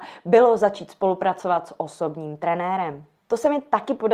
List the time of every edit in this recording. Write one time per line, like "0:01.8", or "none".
none